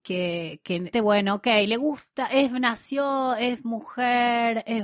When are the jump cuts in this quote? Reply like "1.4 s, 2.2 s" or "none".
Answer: 0.9 s